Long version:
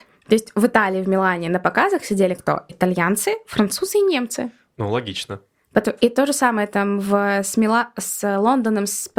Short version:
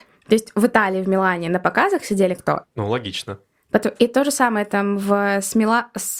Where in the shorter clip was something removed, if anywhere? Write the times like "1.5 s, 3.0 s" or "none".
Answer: 2.6 s